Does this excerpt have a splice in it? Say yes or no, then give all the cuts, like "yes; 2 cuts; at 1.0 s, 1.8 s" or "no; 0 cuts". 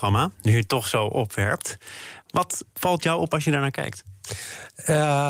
yes; 1 cut; at 2.7 s